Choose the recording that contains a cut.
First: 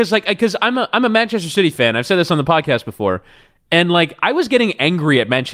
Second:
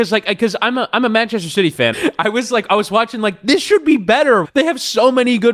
second; 2 cuts; at 1.9 s, 4.4 s

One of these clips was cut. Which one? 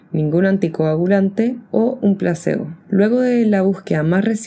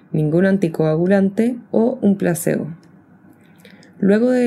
first; 1 cut; at 2.8 s

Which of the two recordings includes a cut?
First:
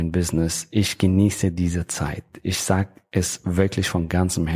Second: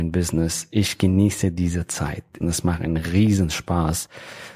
second; 1 cut; at 2.4 s

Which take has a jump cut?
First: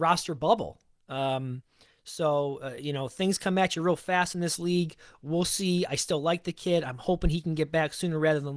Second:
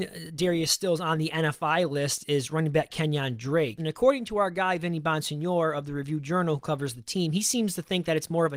second; 1 cut; at 3.8 s

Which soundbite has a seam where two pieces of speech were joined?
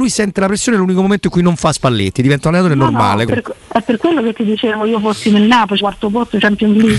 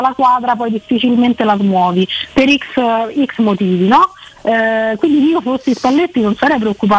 first; 2 cuts; at 3.3 s, 5.8 s

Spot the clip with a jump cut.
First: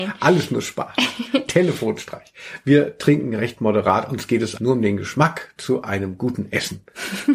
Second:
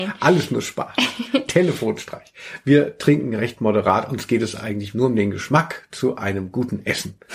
first; 1 cut; at 4.6 s

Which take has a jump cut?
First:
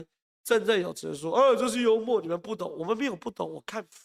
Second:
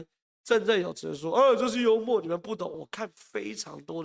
second; 1 cut; at 2.7 s

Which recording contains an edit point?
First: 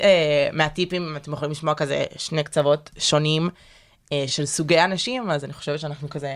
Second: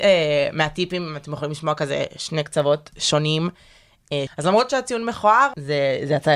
second; 1 cut; at 4.3 s

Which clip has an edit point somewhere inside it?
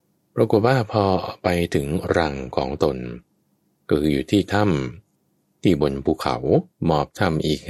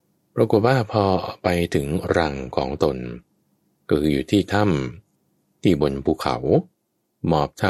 first; 1 cut; at 6.7 s

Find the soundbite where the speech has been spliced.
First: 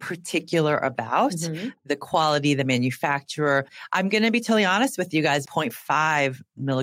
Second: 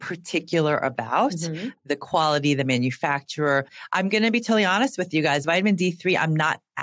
first; 1 cut; at 5.4 s

